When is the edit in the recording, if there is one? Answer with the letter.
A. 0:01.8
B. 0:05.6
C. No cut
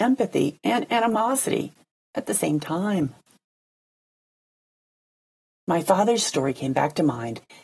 C